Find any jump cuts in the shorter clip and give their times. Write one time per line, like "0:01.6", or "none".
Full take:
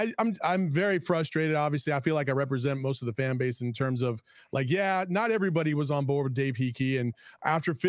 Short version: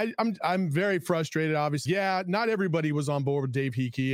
0:01.9